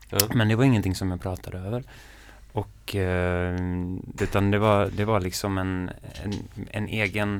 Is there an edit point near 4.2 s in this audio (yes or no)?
yes